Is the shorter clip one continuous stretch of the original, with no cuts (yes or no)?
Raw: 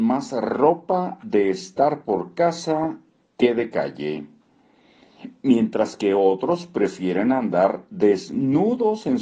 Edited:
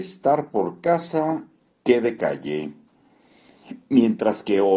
yes